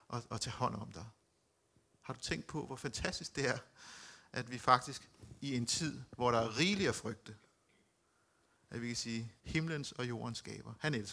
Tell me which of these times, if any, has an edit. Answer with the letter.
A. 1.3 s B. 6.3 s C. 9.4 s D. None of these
C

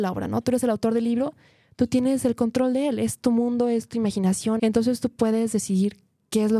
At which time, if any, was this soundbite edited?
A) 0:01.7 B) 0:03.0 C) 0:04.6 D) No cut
C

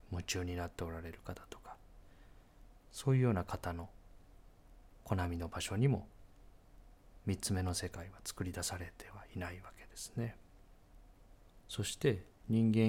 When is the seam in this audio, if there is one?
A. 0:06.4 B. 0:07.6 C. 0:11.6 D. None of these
C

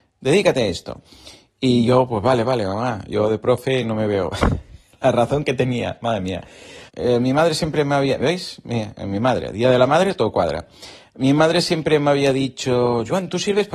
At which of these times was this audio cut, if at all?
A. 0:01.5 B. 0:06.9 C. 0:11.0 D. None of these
B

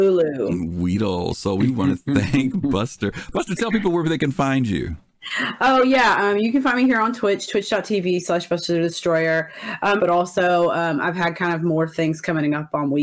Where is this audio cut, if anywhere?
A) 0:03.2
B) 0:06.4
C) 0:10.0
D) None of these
C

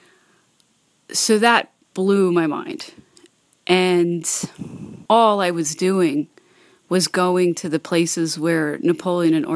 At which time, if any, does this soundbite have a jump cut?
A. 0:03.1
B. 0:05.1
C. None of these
B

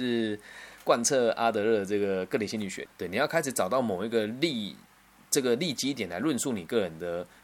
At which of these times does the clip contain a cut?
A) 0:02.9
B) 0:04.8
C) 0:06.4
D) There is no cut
A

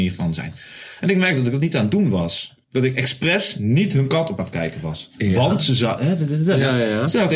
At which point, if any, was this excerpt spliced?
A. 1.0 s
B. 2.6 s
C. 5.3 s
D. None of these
B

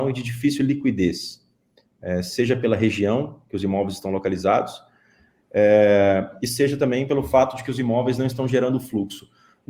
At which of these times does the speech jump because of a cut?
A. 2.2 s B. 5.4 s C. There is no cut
C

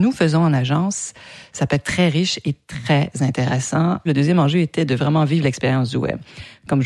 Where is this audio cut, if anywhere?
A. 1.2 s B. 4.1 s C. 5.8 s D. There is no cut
B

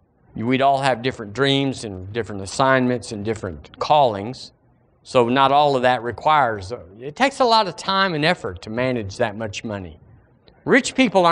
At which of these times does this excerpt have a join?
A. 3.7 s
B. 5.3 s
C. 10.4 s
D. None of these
A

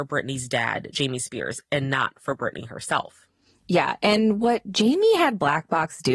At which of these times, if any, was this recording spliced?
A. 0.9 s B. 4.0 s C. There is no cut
C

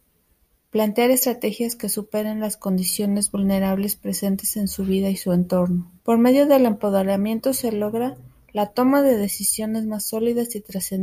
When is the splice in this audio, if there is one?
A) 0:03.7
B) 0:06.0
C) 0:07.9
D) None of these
B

